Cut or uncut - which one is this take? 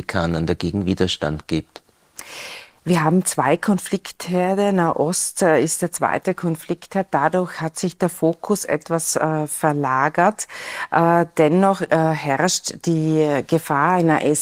uncut